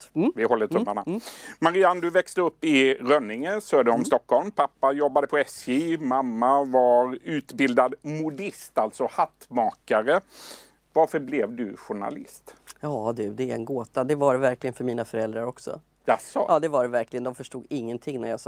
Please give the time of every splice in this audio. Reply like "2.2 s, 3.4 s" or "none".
none